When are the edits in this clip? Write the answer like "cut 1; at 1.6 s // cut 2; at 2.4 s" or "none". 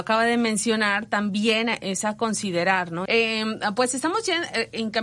cut 1; at 3.1 s

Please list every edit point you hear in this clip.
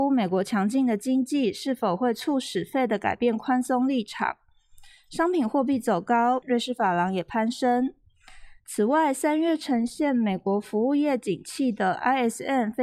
cut 1; at 6.4 s // cut 2; at 8.6 s

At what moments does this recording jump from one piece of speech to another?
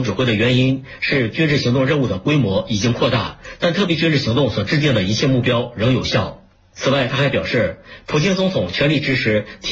none

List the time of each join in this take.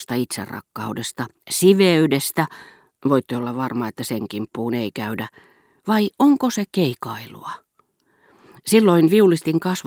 none

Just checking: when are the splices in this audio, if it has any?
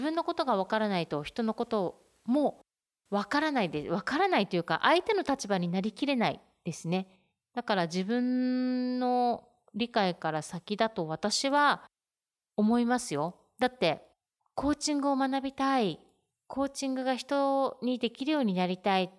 cut 1; at 14.4 s

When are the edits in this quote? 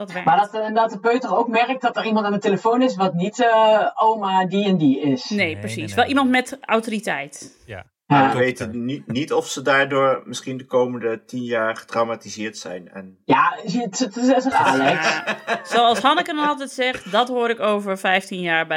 cut 1; at 14.5 s

